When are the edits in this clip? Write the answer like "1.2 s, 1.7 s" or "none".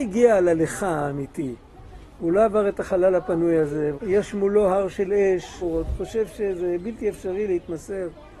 3.9 s, 5.6 s